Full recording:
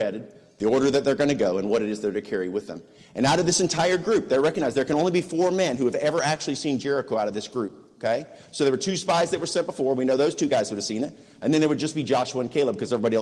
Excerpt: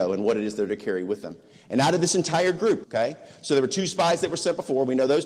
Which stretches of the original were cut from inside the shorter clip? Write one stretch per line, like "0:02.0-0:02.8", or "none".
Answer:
0:04.3-0:07.9